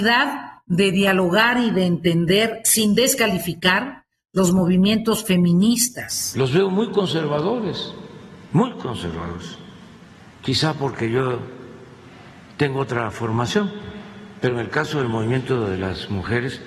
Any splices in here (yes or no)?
yes